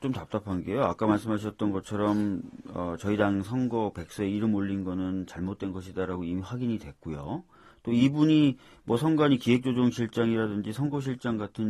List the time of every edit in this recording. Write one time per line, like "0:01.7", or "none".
none